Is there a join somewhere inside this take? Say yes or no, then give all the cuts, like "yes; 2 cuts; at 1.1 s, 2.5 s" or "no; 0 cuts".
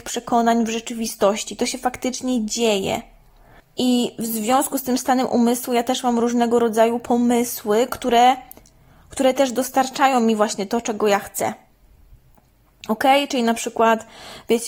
no; 0 cuts